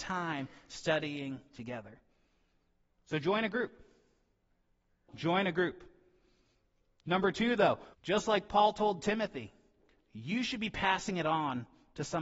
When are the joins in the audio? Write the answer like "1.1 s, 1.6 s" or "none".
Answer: 5.1 s, 7.9 s